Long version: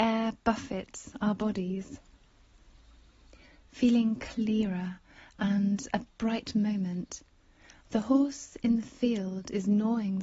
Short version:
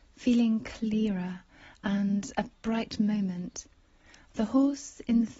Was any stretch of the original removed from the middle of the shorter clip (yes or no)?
no